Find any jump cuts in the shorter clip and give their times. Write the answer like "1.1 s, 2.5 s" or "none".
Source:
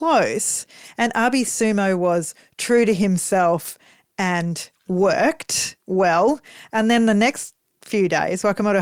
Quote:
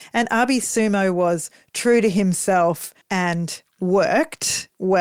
3.0 s